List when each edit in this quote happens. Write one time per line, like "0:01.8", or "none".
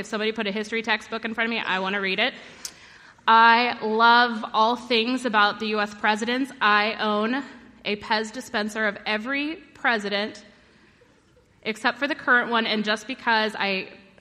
none